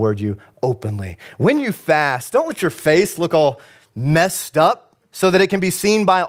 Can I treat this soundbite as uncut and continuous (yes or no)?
yes